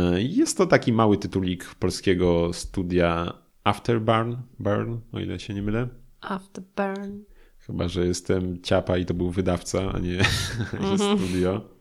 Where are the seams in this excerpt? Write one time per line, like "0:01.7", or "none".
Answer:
none

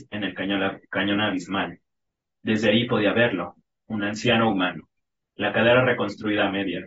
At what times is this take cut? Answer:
none

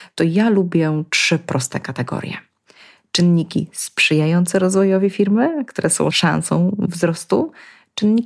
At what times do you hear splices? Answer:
none

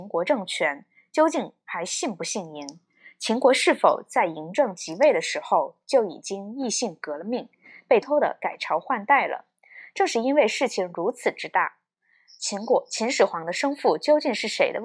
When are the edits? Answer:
0:08.0

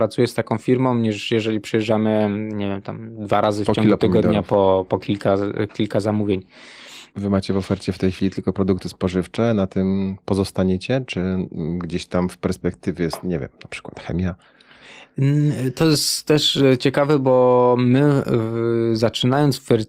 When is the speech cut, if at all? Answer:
0:07.1

